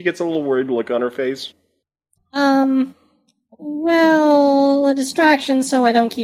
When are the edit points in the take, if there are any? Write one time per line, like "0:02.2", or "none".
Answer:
0:02.2